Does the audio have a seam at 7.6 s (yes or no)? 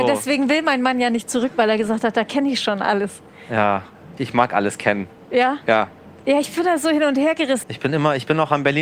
yes